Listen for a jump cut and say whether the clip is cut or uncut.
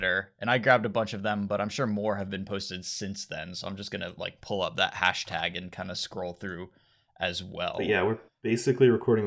uncut